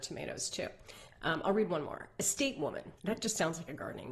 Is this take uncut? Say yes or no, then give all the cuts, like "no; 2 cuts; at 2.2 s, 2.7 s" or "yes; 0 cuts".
no; 1 cut; at 3.0 s